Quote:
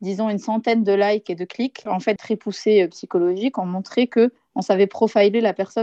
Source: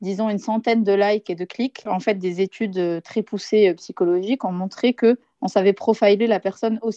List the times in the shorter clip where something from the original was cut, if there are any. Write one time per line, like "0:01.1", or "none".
0:02.2